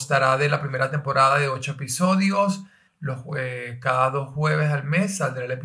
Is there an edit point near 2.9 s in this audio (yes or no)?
yes